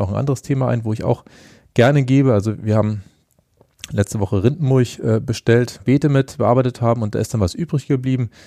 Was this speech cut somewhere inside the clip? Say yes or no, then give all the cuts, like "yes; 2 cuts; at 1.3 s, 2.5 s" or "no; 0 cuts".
yes; 1 cut; at 5.8 s